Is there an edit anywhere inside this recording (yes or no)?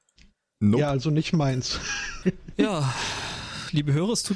yes